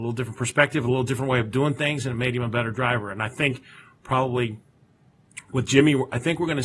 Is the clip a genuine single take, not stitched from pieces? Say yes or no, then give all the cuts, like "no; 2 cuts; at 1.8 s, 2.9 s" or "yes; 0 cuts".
yes; 0 cuts